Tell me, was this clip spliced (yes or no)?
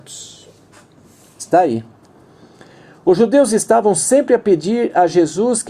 no